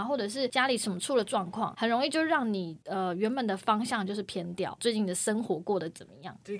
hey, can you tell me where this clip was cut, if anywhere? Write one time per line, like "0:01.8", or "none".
0:04.8

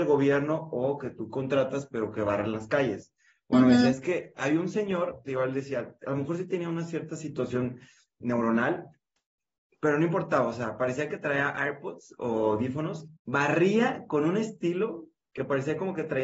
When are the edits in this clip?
0:08.2
0:13.2

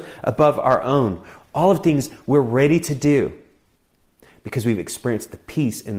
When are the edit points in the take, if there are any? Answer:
0:01.4

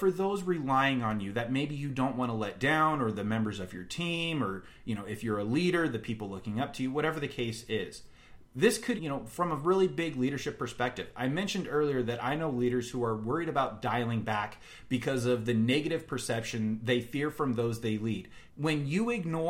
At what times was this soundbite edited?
0:09.0
0:18.5

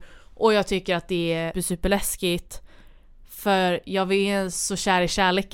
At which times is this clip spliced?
0:01.5

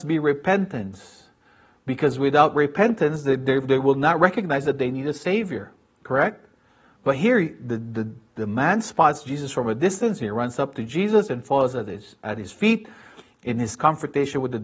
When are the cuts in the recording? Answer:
none

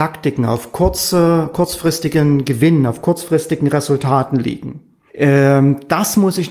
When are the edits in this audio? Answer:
0:05.1

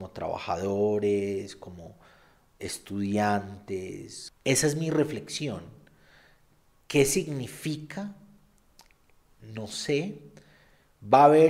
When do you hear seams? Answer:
none

